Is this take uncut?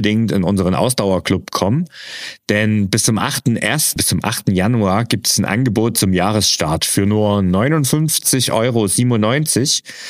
no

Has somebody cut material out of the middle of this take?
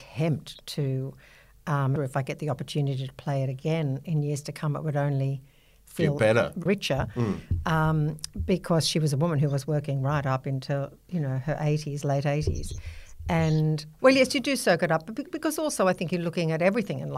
yes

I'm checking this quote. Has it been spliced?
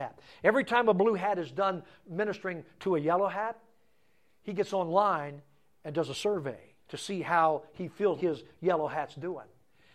yes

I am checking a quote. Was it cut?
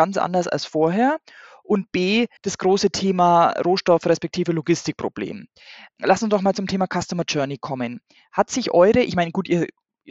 yes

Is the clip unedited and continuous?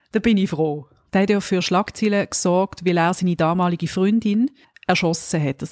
no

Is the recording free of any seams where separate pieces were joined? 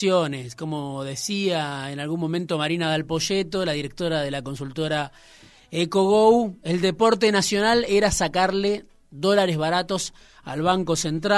yes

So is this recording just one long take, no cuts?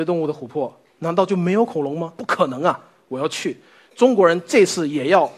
no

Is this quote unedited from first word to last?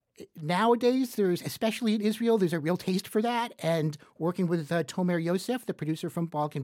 yes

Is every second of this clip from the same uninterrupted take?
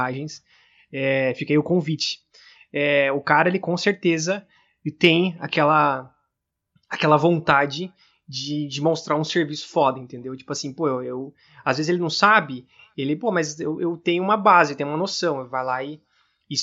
yes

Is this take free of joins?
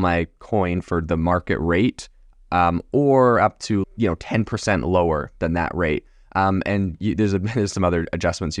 no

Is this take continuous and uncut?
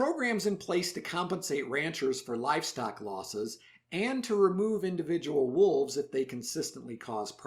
yes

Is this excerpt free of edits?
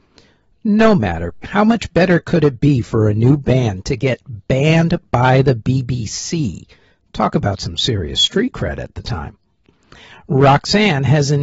no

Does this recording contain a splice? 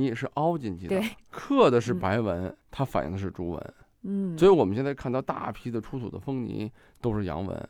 no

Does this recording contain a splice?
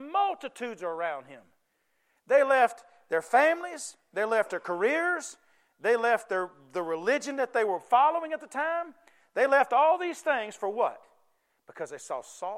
no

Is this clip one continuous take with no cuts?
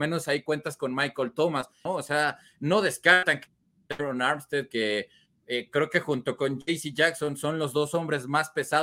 no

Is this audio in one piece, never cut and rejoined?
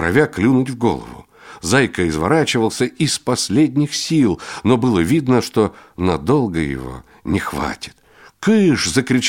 yes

